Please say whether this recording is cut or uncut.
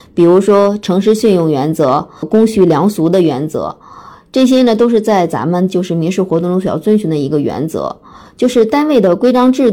uncut